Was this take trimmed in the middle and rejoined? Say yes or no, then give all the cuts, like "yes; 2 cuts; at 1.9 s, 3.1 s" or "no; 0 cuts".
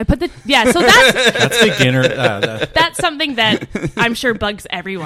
no; 0 cuts